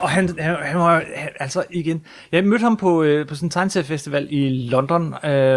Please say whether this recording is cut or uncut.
uncut